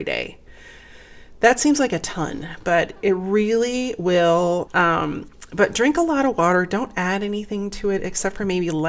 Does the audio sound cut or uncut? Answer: cut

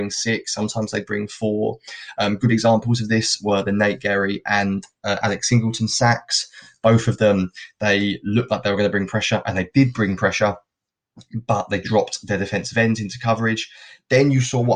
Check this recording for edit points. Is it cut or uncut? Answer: uncut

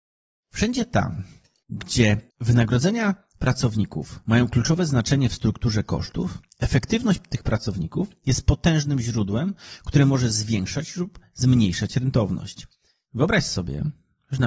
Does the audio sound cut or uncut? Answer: uncut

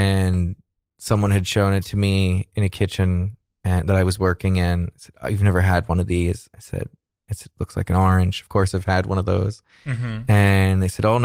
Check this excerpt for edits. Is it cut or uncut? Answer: uncut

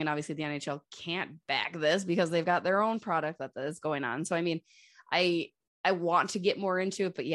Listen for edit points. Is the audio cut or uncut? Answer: uncut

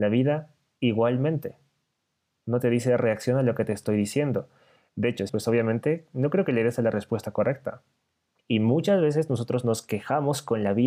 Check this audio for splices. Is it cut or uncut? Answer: cut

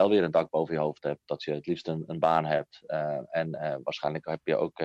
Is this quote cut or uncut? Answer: uncut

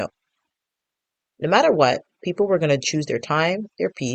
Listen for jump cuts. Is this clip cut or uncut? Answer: uncut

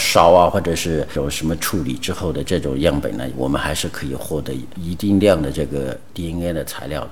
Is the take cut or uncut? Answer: uncut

